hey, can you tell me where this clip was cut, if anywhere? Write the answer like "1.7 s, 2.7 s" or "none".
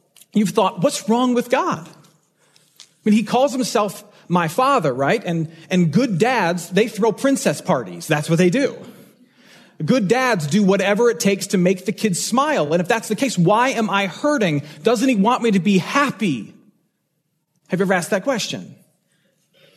none